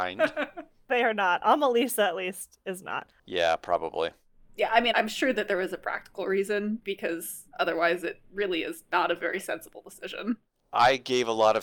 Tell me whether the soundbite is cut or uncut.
cut